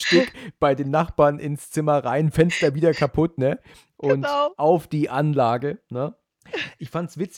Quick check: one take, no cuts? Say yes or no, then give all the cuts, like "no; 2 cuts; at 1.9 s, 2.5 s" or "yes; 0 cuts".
yes; 0 cuts